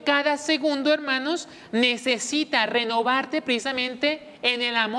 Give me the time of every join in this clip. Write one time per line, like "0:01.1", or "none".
none